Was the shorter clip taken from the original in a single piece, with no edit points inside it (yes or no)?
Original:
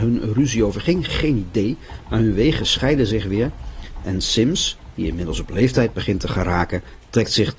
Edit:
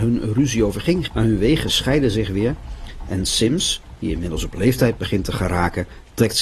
no